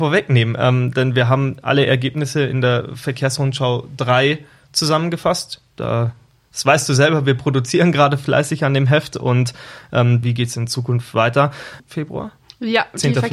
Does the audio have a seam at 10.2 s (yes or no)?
yes